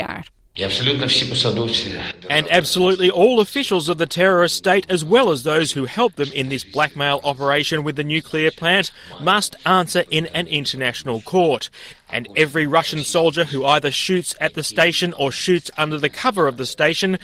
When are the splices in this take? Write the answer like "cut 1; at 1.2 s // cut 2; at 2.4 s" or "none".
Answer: cut 1; at 11.9 s